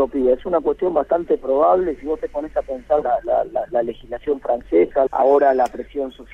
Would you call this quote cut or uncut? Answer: cut